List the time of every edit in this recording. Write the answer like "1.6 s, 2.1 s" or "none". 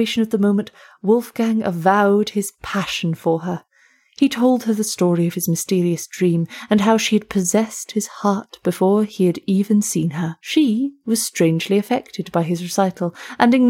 10.4 s

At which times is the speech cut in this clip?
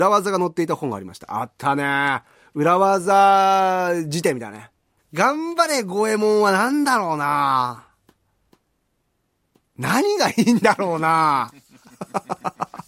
5.0 s

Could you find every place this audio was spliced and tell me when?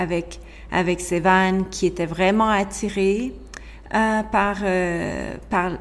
none

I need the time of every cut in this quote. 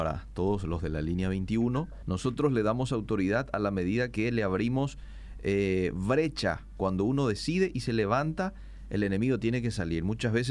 2.0 s

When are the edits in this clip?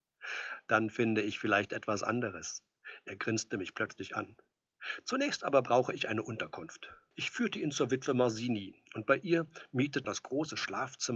10.0 s

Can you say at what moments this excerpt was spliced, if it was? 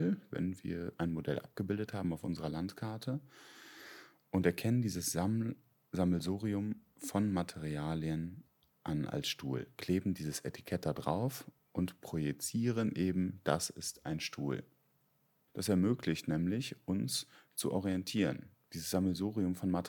15.5 s, 18.7 s

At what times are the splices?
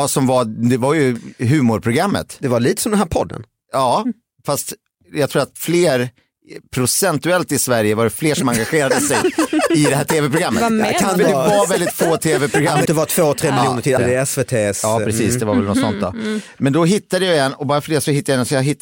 12.9 s, 14.0 s

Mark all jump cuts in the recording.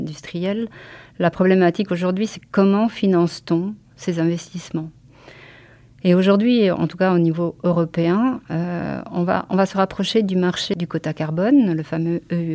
none

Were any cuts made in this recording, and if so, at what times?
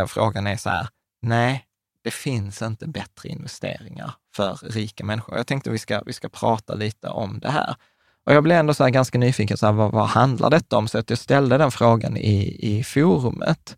none

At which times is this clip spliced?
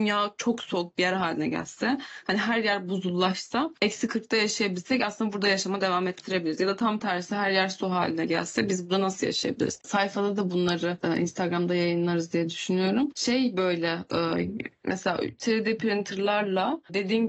3.8 s, 9.8 s

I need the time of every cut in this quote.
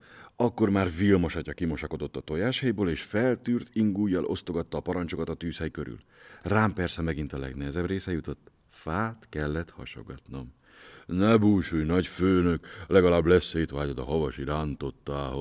none

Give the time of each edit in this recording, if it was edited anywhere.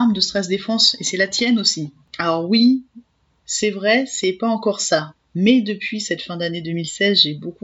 none

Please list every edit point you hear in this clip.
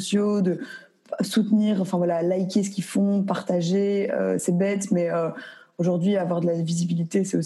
none

